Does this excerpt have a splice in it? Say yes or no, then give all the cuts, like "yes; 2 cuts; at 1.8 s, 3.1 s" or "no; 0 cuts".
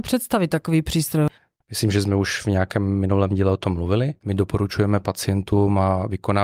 yes; 2 cuts; at 1.6 s, 4.2 s